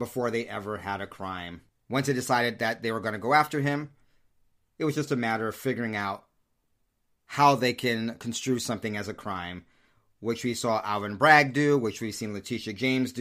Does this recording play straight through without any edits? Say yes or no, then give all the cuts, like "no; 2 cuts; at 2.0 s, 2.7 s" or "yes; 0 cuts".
yes; 0 cuts